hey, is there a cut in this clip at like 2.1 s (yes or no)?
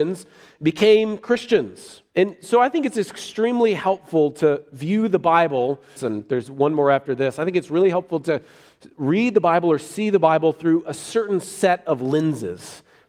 yes